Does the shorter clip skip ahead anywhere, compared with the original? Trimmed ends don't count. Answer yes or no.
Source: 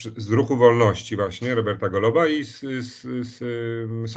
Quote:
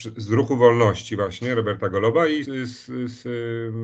yes